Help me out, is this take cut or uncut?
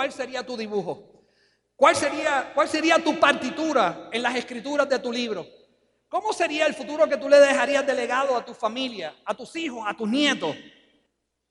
uncut